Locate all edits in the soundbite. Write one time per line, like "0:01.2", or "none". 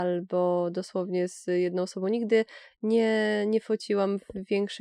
none